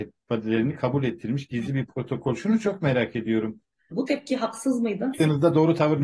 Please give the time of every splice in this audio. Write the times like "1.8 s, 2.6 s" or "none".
3.9 s, 5.1 s